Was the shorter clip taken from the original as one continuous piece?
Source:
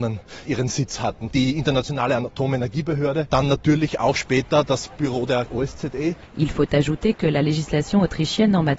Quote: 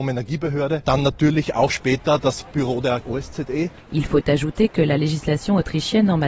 yes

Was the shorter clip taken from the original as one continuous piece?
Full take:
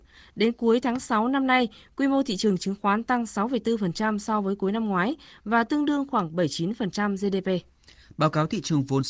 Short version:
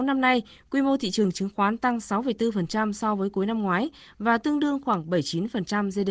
yes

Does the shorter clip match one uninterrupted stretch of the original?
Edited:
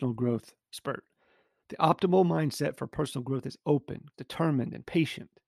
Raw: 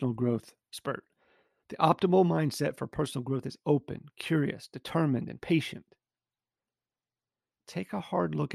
no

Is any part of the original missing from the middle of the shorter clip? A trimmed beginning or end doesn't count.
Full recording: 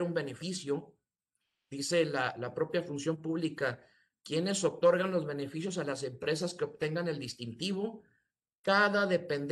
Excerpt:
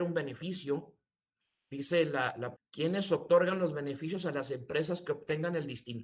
yes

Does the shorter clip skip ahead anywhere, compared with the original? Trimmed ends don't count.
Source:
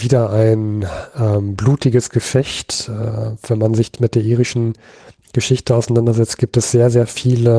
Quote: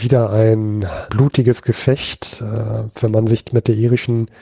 yes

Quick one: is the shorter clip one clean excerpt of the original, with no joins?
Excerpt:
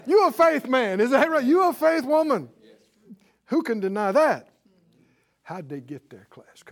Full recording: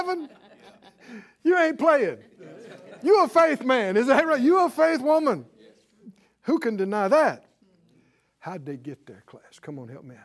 yes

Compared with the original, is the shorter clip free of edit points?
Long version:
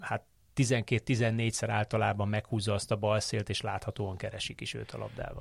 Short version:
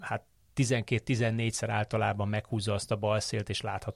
yes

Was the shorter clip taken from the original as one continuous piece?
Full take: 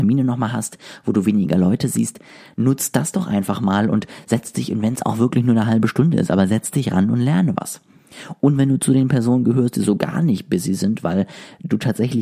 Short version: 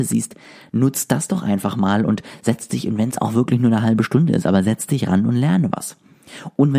yes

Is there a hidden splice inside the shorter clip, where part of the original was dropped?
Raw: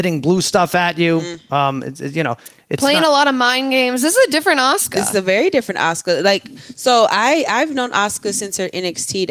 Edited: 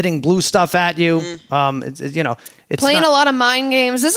no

